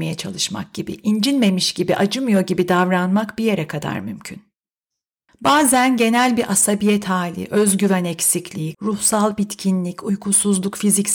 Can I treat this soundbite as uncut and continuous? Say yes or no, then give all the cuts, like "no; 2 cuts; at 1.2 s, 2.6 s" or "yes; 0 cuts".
no; 2 cuts; at 5.3 s, 8.7 s